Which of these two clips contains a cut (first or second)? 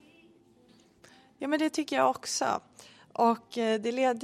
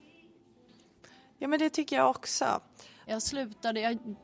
second